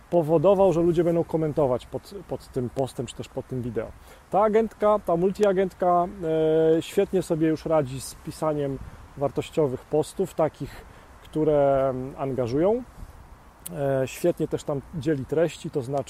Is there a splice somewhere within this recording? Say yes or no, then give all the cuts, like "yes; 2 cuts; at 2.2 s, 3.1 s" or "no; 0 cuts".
no; 0 cuts